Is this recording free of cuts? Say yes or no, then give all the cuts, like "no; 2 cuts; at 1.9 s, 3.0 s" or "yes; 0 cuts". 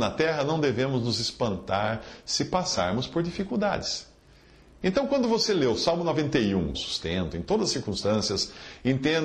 no; 1 cut; at 6.7 s